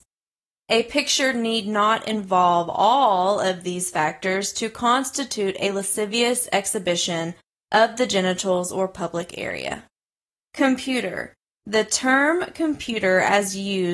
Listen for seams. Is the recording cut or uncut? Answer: uncut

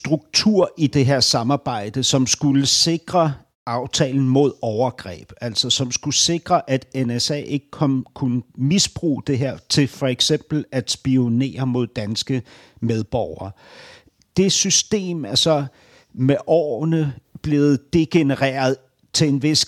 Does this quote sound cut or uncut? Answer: uncut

